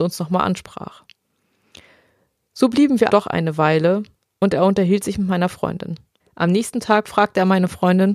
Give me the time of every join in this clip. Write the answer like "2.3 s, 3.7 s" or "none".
3.1 s, 6.2 s

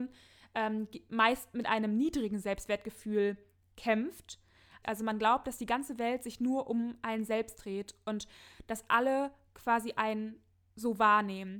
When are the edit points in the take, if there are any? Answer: 4.8 s

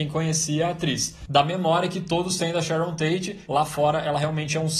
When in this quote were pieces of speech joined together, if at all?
1.3 s, 3.5 s

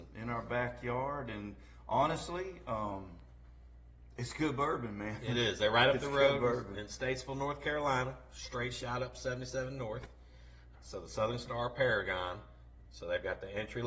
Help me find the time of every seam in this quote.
10.7 s, 12.8 s

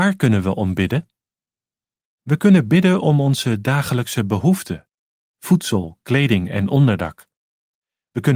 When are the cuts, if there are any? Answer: 2.0 s

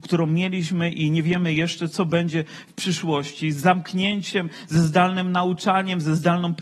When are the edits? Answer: 1.9 s

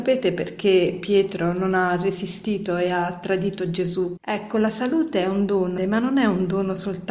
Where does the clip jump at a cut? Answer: 4.2 s, 5.8 s

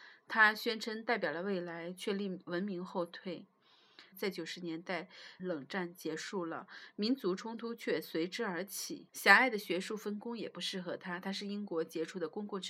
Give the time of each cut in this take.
4.1 s, 5.4 s, 9.1 s

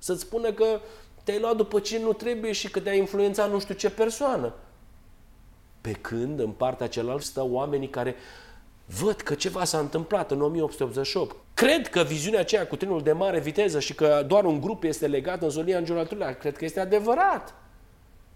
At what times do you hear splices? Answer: 7.2 s, 11.4 s

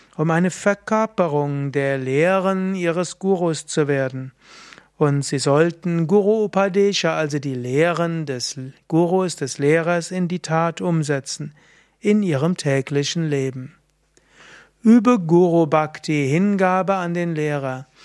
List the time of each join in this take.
none

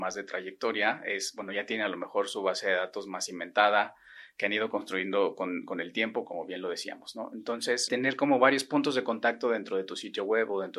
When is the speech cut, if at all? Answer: 6.2 s, 7.9 s

